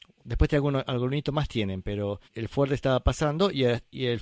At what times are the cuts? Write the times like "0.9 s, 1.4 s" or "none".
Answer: 2.2 s